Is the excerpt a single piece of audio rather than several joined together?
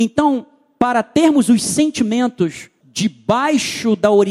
no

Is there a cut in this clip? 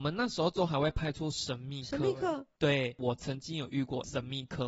yes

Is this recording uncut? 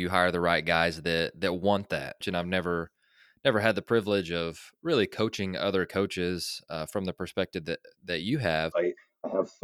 no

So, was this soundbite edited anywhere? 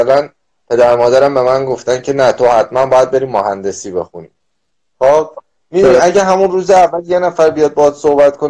no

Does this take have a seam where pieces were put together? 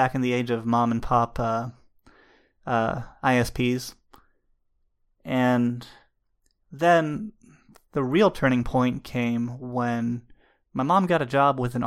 no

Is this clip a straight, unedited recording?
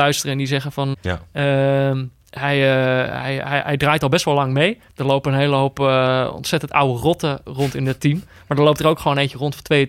no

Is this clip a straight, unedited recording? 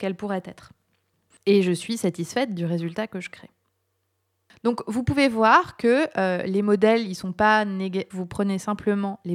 no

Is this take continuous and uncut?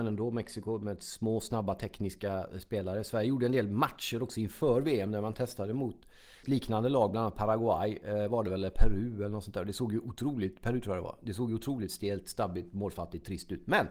no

